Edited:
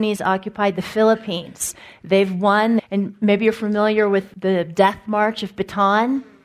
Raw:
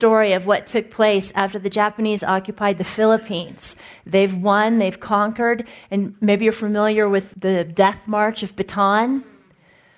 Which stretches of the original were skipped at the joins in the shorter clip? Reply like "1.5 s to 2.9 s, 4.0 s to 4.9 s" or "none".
4.8 s to 5.8 s